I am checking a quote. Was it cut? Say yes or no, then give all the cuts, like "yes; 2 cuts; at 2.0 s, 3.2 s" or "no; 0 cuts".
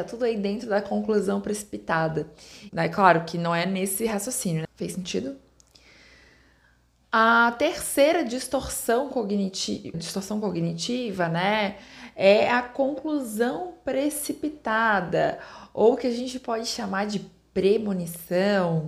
yes; 3 cuts; at 2.7 s, 4.6 s, 9.9 s